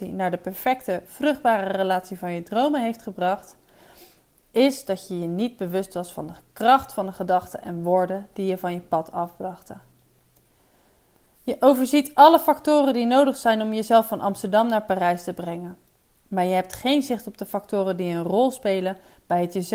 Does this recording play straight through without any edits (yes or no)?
no